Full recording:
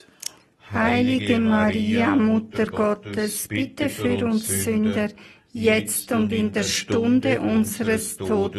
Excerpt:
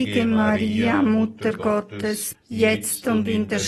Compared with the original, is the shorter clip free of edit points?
no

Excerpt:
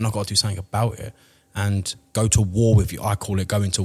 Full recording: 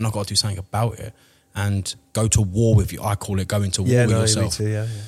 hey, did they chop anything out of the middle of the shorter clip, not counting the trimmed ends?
no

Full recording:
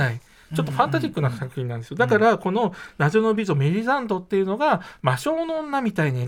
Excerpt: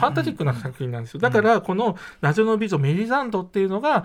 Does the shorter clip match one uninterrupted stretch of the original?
yes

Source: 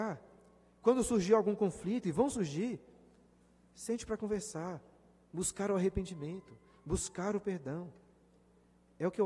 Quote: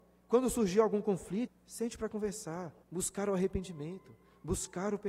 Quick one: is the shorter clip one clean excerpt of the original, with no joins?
no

